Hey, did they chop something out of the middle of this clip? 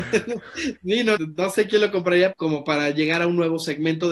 yes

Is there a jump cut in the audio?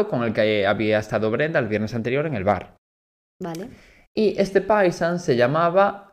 no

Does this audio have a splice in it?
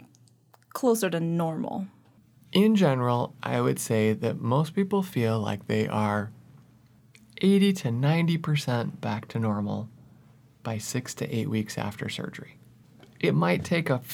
no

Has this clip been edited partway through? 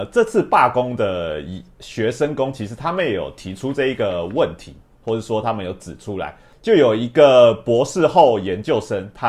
no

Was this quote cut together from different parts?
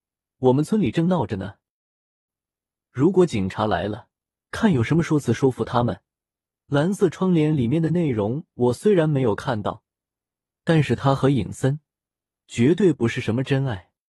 yes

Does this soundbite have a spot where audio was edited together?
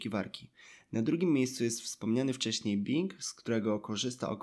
no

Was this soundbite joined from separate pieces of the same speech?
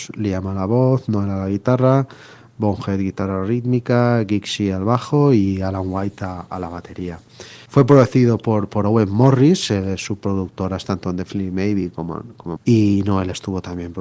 yes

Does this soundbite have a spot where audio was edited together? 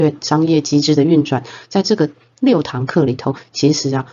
no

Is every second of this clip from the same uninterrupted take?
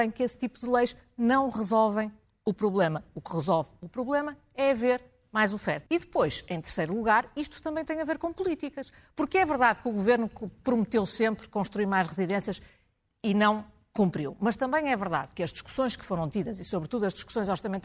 no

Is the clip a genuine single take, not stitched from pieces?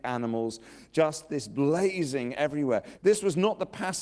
no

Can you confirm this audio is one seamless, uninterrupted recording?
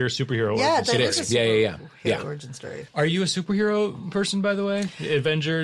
no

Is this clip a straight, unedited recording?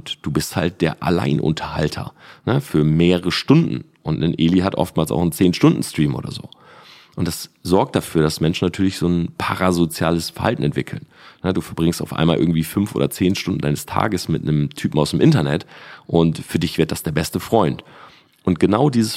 yes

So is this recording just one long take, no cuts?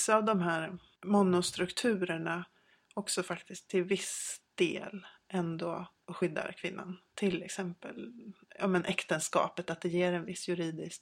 yes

